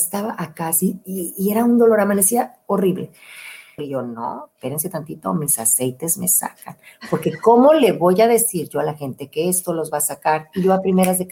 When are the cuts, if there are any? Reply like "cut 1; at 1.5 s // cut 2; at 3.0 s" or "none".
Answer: cut 1; at 3.8 s